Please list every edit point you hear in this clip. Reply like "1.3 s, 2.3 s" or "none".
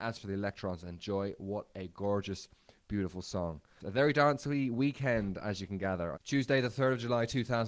3.8 s, 6.1 s